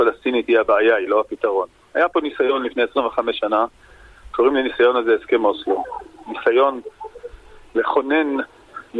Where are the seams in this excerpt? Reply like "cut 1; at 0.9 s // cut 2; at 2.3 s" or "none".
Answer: none